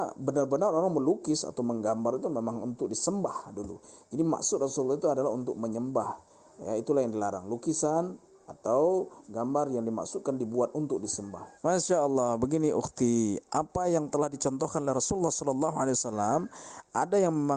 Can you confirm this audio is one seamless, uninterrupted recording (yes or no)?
no